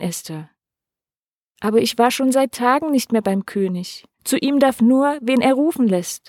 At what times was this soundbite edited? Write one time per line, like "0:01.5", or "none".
0:01.5
0:04.1